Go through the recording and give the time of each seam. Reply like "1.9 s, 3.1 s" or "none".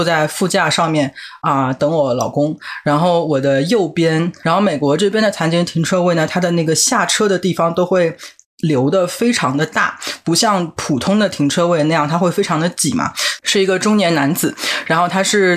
4.4 s, 13.4 s